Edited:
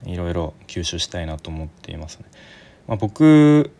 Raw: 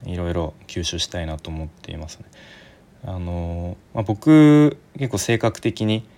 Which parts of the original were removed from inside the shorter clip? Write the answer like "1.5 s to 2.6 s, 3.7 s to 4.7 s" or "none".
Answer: 2.8 s to 3.9 s